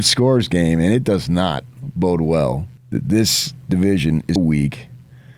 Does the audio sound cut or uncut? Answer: cut